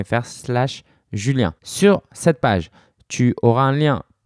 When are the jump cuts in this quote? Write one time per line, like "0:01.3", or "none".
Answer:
0:01.6